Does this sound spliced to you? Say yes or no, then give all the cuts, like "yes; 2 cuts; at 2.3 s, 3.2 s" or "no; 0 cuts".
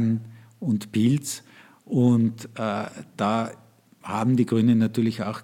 no; 0 cuts